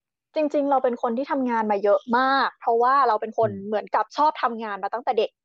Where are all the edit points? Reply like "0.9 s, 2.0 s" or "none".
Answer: 4.1 s